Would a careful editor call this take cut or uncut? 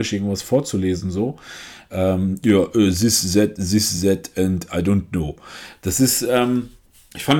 uncut